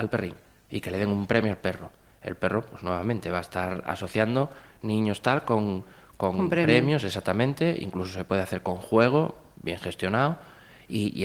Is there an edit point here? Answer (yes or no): no